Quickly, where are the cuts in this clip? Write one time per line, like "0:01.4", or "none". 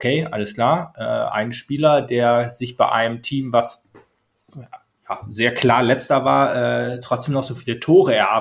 none